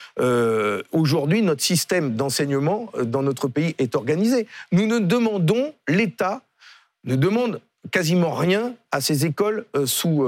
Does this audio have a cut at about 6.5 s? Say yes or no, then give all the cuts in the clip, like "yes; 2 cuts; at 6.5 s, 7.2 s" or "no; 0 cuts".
no; 0 cuts